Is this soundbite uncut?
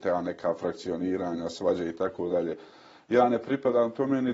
yes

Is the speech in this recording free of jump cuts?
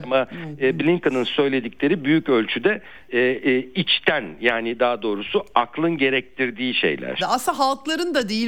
no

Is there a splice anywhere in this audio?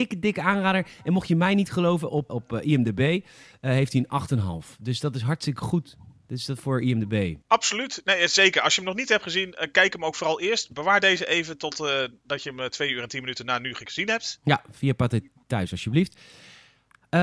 yes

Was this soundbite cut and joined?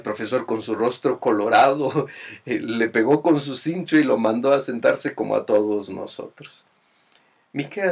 no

